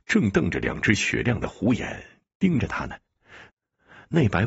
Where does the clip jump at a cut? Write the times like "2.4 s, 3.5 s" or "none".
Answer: 3.5 s